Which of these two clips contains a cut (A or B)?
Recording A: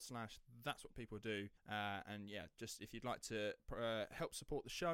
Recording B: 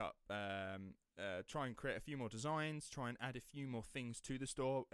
A